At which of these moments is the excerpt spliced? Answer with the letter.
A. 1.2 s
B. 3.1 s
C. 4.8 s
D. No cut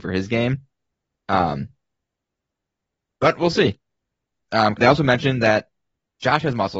C